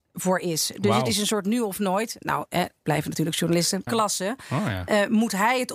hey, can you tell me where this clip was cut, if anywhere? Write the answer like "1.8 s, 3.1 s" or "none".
3.9 s